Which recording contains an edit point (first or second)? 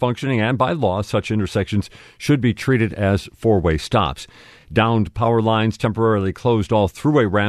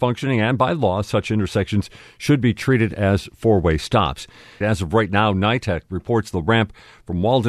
second